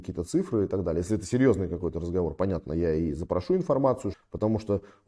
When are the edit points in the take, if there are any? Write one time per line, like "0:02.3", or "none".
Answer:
0:04.1